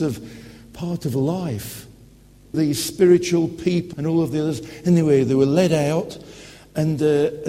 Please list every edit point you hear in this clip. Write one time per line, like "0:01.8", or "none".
0:02.5
0:03.9